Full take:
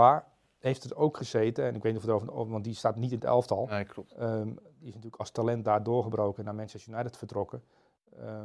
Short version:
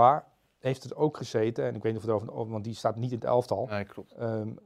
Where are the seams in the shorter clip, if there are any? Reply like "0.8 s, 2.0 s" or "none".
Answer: none